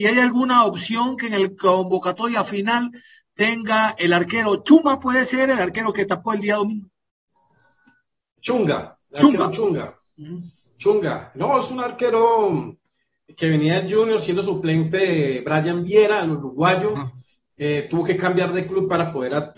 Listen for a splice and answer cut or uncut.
uncut